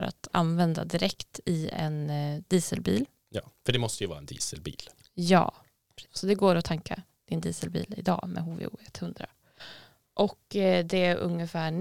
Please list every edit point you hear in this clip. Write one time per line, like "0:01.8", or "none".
0:06.0